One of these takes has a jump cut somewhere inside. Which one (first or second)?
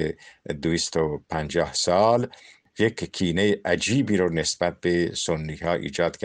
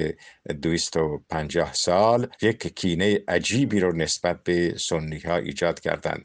second